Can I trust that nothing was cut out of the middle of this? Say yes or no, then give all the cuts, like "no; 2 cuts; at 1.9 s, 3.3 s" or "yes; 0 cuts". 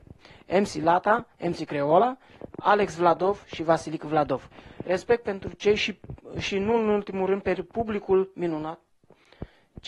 yes; 0 cuts